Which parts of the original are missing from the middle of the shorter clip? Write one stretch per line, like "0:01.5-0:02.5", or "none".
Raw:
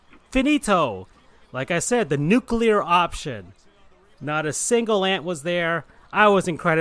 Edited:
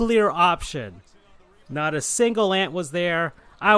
none